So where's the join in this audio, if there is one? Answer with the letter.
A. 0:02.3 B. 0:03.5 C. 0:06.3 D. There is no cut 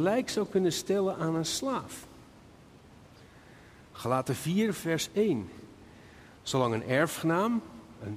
D